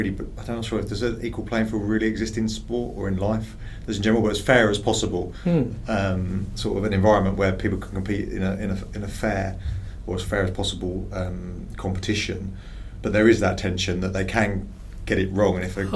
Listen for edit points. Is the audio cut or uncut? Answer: uncut